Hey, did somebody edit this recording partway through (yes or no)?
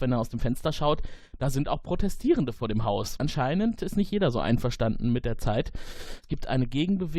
no